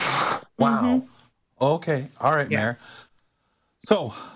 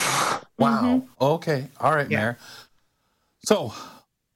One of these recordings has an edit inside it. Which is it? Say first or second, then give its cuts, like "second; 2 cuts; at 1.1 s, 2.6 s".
second; 1 cut; at 1.1 s